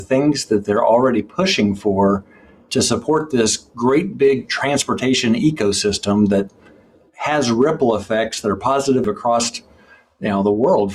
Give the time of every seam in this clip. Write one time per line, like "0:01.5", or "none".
none